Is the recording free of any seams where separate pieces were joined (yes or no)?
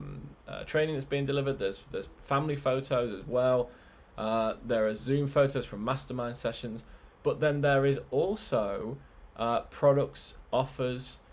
yes